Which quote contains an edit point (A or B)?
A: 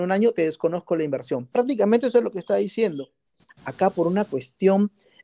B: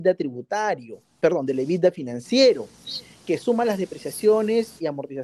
A